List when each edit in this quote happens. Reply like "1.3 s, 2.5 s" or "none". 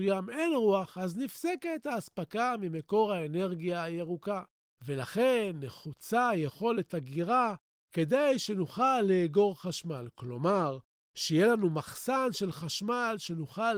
none